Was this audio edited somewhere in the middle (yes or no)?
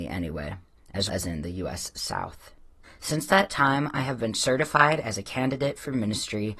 yes